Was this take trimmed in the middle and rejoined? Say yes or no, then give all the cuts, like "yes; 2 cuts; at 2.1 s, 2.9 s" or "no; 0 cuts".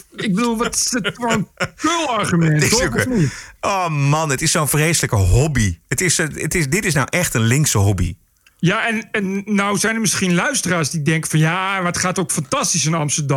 no; 0 cuts